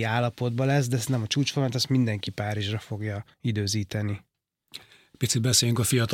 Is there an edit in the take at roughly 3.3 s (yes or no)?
yes